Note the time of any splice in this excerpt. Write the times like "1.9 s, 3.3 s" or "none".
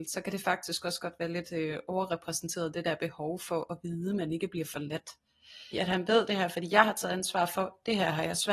5.7 s